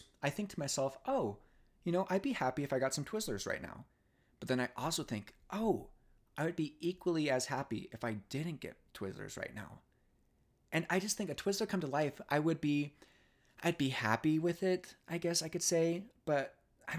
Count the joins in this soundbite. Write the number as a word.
zero